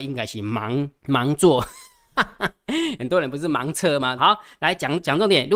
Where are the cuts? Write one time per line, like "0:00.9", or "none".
0:01.0
0:04.2